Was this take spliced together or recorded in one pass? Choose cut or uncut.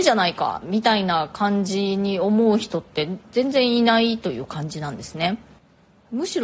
uncut